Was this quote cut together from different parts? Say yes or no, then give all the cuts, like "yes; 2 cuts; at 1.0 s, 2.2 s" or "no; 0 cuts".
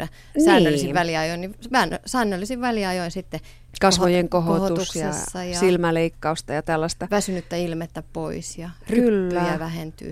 no; 0 cuts